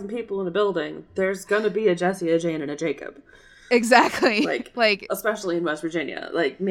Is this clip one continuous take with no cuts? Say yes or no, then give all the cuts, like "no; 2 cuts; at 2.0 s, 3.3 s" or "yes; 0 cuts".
yes; 0 cuts